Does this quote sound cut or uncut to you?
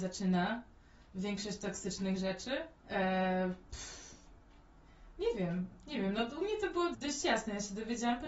cut